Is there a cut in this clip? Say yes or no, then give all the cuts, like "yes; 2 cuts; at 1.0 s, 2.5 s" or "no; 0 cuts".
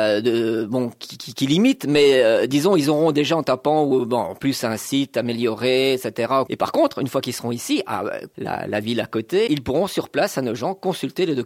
yes; 3 cuts; at 6.5 s, 8.3 s, 9.5 s